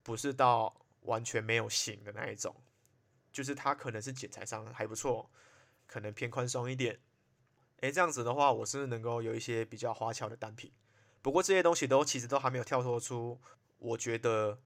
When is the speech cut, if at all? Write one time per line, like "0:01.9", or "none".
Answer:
0:11.1